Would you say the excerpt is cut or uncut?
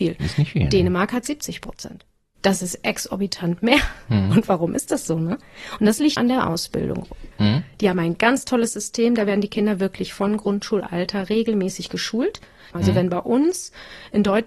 cut